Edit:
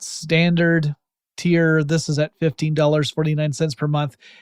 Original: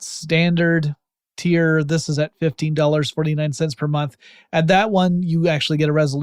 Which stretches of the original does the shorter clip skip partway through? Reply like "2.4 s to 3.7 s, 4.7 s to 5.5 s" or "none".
none